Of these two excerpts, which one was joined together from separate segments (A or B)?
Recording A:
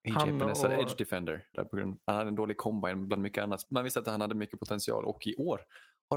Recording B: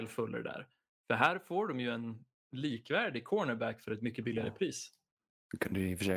A